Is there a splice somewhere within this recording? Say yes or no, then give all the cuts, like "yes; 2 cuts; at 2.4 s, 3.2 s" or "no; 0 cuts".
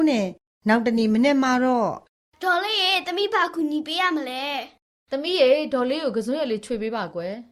no; 0 cuts